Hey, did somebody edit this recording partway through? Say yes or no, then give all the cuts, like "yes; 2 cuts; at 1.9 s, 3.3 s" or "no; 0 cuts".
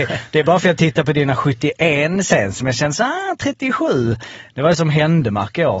no; 0 cuts